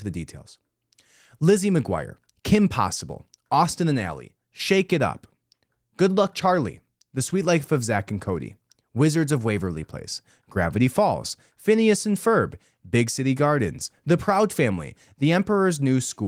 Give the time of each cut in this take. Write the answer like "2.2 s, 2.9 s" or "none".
none

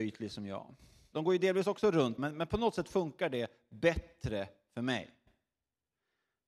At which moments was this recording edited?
1.1 s, 2.2 s

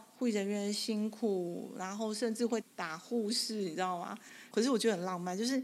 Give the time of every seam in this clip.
2.6 s, 4.5 s

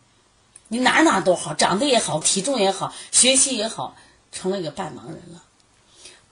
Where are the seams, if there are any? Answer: 2.2 s

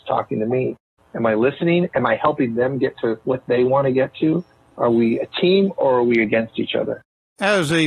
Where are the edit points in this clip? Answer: 1.0 s

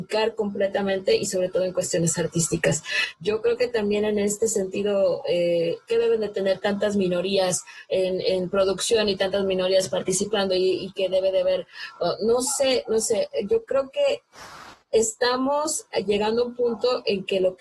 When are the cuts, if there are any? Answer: 5.9 s

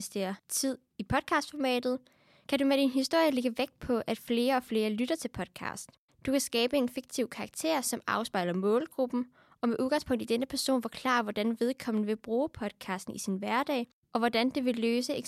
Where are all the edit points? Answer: none

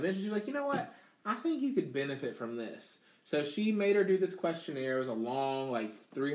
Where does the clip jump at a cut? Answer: none

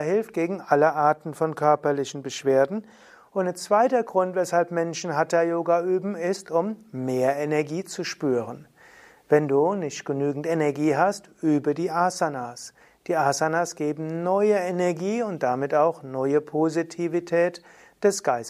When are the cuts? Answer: none

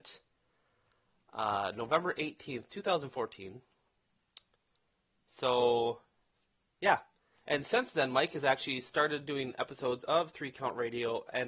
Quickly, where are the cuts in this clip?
none

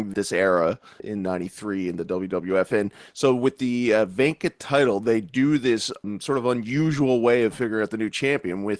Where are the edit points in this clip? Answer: none

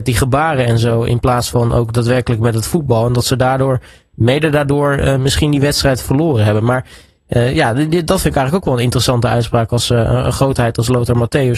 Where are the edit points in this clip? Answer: none

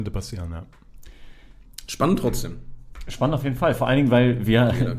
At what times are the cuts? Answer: none

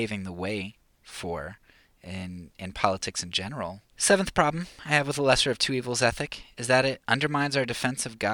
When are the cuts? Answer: 3.9 s

